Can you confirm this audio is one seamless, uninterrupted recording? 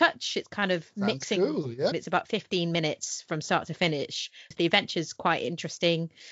no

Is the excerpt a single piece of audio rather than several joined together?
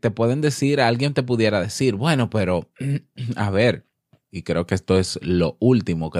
no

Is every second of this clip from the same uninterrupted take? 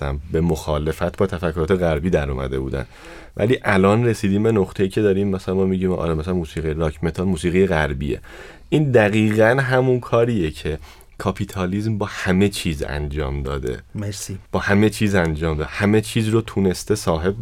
no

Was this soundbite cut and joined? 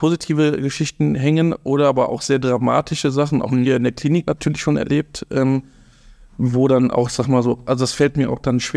no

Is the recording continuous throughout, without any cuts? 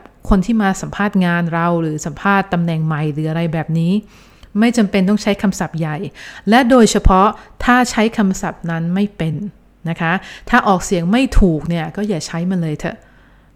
yes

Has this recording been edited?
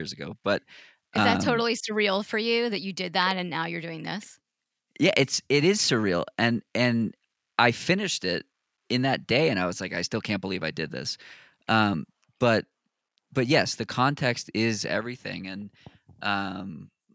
no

